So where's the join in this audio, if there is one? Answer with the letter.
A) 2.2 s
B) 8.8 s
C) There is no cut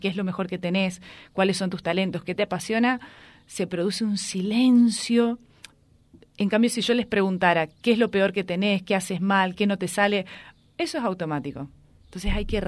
C